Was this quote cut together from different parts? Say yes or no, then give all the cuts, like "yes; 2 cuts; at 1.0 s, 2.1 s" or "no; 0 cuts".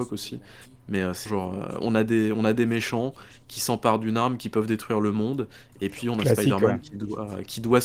yes; 1 cut; at 1.3 s